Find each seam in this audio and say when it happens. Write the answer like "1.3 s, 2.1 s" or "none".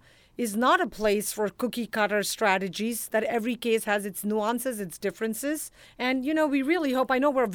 5.8 s